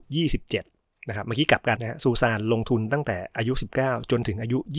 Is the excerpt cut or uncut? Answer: cut